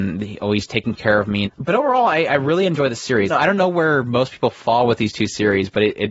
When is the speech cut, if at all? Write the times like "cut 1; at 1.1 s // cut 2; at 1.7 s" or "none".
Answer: cut 1; at 1.5 s // cut 2; at 3.3 s